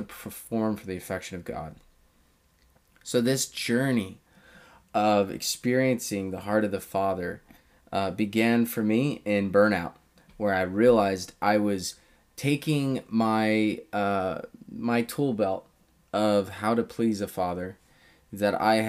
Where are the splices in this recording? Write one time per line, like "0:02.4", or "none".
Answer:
none